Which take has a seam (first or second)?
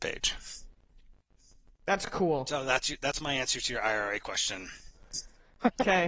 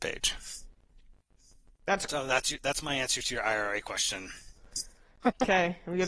second